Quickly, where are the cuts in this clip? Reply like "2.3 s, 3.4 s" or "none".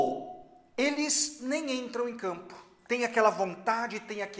none

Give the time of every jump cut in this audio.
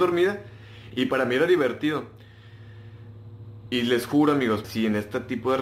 0.9 s, 3.6 s, 4.6 s

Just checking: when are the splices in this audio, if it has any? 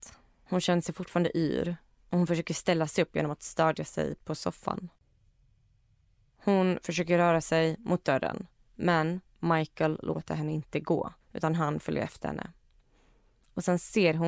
6.3 s, 11.2 s

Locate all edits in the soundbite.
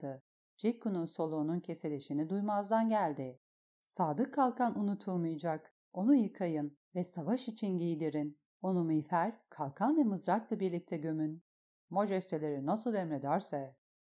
none

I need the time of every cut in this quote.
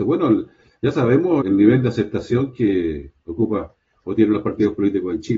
1.4 s

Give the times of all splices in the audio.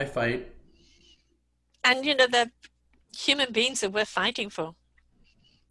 none

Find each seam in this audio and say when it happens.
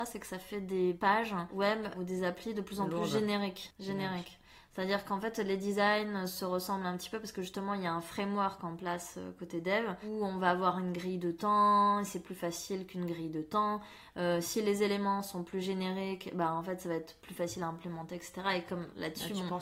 none

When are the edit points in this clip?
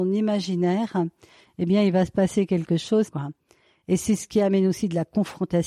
3.1 s

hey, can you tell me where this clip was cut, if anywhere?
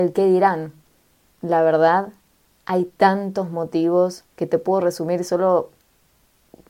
1.3 s, 4.3 s

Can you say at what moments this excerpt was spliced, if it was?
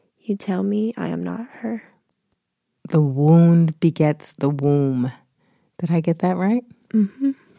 2.8 s

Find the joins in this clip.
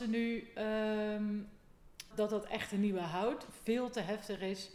2.1 s

